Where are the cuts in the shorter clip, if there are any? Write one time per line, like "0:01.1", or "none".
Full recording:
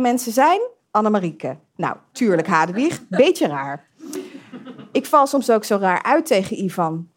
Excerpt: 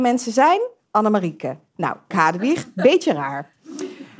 0:02.1